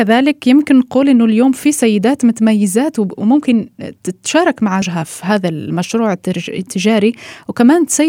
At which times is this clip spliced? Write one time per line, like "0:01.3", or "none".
0:04.8

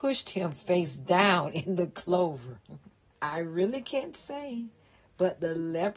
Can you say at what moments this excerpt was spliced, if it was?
0:03.1

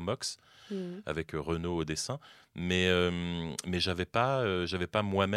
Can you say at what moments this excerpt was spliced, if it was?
none

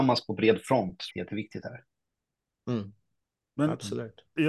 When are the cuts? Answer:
0:01.1

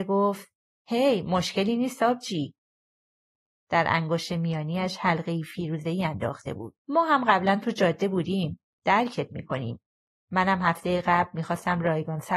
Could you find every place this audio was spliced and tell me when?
0:06.8

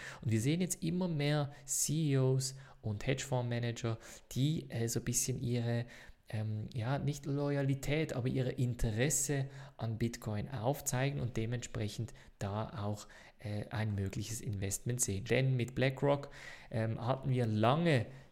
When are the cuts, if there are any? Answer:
0:15.3

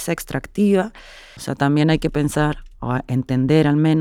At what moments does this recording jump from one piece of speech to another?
0:01.4

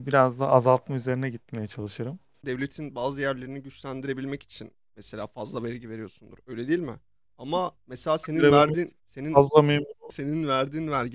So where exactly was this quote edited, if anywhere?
0:02.4

